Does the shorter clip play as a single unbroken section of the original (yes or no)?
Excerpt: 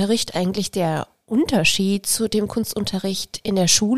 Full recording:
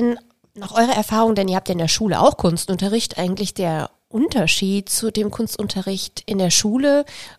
yes